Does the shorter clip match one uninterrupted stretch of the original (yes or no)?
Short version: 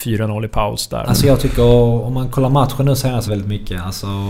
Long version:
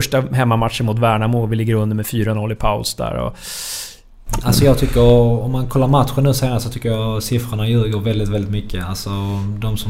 no